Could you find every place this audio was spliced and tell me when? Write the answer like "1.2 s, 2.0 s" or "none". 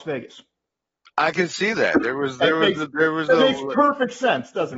none